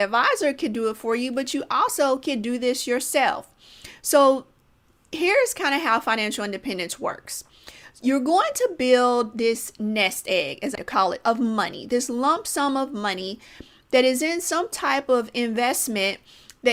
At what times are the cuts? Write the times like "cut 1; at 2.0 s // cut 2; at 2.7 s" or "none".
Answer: cut 1; at 10.7 s